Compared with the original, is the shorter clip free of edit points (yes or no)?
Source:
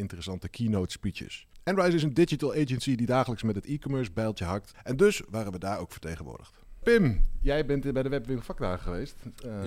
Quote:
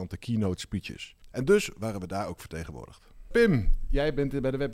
no